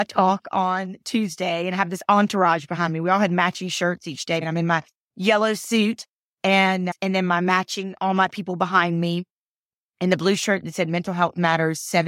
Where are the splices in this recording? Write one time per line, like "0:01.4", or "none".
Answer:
0:04.4